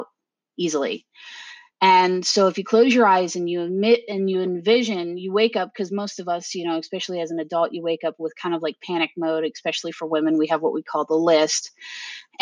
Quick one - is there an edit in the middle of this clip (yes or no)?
no